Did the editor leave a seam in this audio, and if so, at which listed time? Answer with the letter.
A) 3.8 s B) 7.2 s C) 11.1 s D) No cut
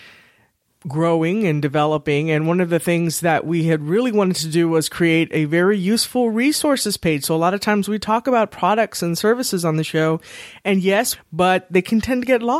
C